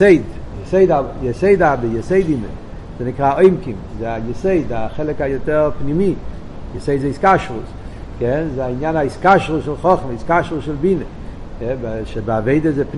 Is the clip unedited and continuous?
yes; 0 cuts

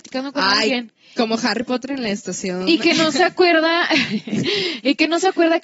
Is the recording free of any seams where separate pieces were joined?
yes; 0 cuts

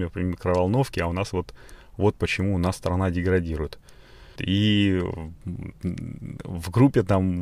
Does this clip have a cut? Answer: yes; 1 cut; at 4.4 s

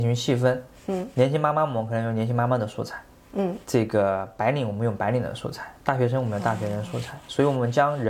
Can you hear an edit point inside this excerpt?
yes; 1 cut; at 3.6 s

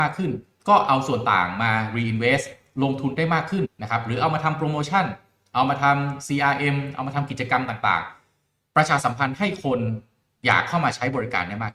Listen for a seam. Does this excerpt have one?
yes; 1 cut; at 3.6 s

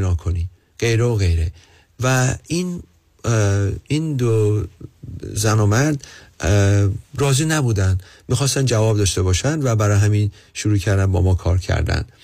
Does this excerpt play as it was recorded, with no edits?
yes; 0 cuts

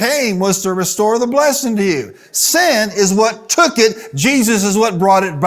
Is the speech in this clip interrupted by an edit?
no; 0 cuts

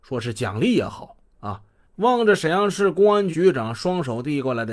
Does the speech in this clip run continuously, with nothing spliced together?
no; 2 cuts; at 1.8 s, 3.3 s

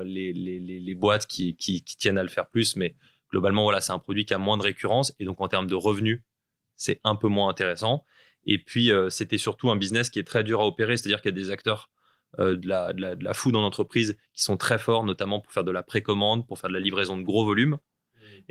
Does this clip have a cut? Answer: no; 0 cuts

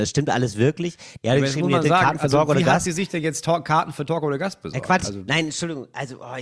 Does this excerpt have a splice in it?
no; 0 cuts

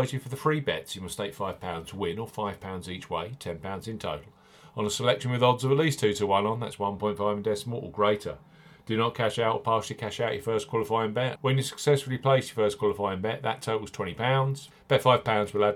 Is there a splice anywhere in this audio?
yes; 2 cuts; at 11.4 s, 14.7 s

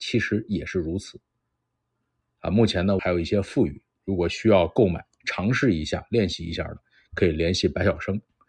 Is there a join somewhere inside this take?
yes; 1 cut; at 3.0 s

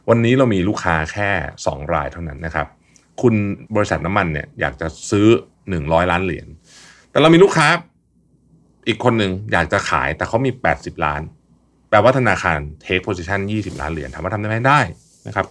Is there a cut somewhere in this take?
yes; 2 cuts; at 2.4 s, 3.7 s

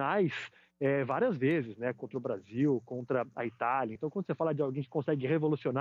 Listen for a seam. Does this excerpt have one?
yes; 1 cut; at 4.0 s

